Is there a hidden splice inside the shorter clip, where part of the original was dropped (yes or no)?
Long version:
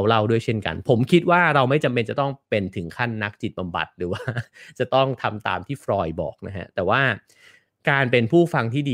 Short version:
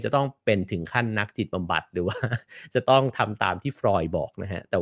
no